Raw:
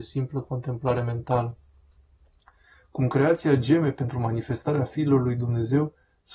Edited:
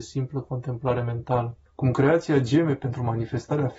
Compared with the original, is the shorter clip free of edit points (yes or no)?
no